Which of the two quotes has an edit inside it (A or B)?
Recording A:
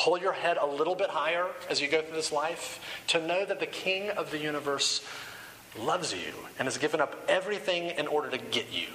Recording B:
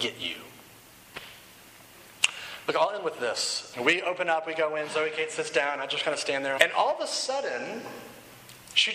B